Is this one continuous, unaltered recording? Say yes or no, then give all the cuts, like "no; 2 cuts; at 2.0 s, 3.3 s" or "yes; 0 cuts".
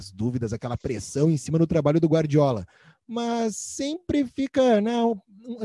yes; 0 cuts